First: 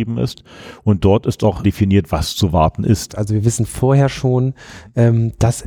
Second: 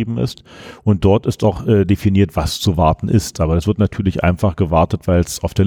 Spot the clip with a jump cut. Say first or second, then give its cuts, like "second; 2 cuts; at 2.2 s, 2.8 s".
first; 2 cuts; at 1.6 s, 3.1 s